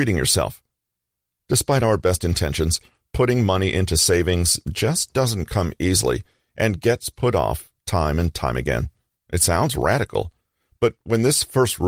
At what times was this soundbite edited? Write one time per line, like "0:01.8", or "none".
0:09.1